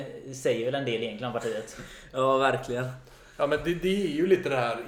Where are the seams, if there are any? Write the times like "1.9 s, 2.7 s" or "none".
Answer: none